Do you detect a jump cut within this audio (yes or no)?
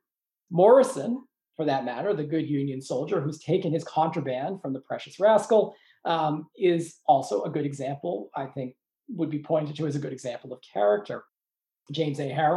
no